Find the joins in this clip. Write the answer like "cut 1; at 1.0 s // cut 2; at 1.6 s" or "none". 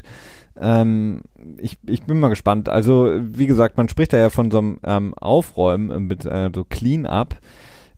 none

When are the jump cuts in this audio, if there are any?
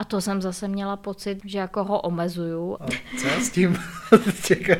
cut 1; at 1.4 s // cut 2; at 2.8 s

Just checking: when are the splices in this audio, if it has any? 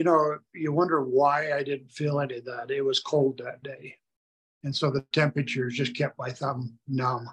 none

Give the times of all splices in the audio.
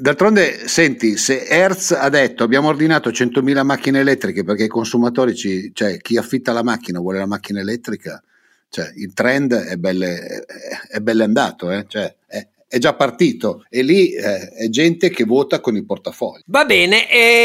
none

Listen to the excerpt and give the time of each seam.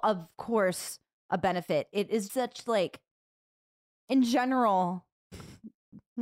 cut 1; at 2.3 s

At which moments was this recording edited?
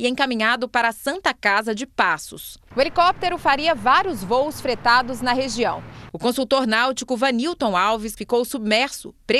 cut 1; at 6.1 s // cut 2; at 8.2 s

